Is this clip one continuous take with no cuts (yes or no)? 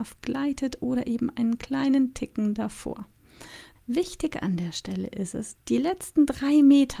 no